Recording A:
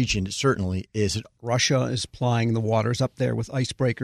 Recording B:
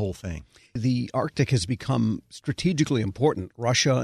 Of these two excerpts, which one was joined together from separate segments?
A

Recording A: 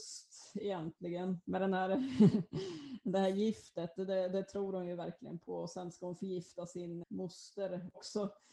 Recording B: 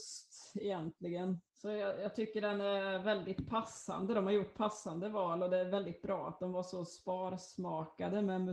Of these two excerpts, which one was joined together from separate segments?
A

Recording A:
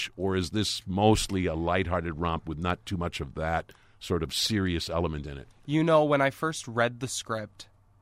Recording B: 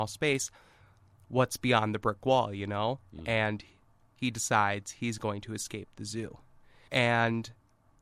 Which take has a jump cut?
B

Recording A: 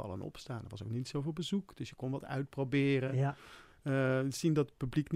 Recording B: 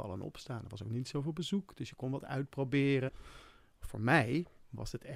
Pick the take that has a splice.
B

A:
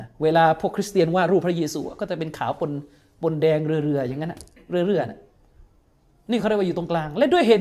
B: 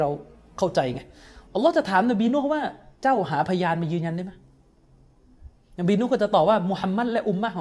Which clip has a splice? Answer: B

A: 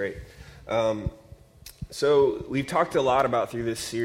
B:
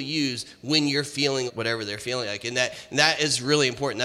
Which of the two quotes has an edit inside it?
B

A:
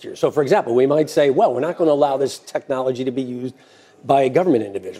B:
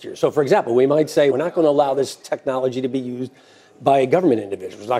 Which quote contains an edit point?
B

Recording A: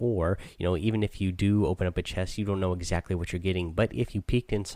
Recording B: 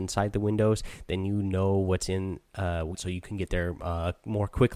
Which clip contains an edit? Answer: B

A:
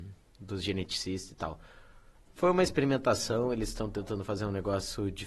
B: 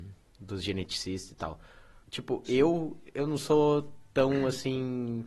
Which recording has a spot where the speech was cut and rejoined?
B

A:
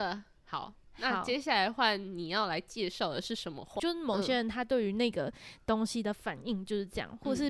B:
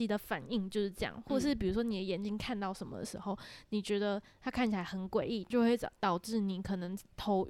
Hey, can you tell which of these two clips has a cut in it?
A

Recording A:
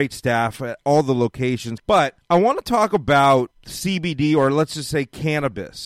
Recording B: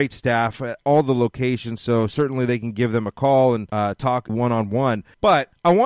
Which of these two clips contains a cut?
A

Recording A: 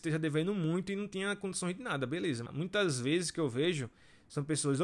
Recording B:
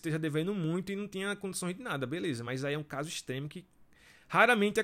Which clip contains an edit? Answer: A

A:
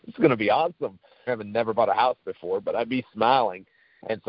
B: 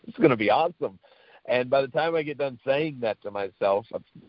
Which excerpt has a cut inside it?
A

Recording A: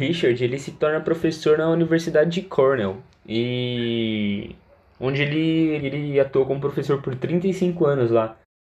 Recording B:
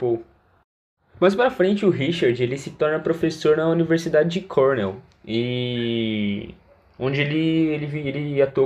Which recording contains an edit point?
A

